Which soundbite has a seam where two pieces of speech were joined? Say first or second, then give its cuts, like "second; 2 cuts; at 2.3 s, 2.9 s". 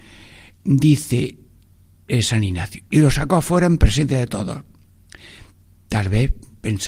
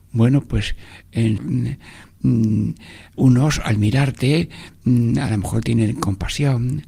second; 2 cuts; at 1.4 s, 3.1 s